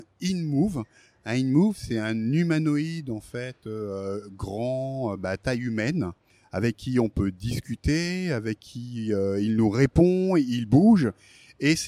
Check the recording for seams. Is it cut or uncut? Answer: uncut